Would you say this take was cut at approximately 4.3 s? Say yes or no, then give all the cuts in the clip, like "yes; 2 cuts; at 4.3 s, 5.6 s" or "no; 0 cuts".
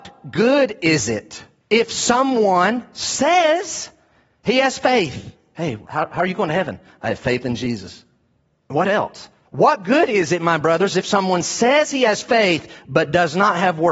no; 3 cuts; at 1.6 s, 5.8 s, 9.4 s